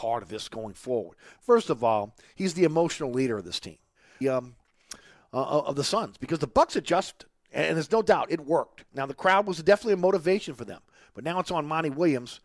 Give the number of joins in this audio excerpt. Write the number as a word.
one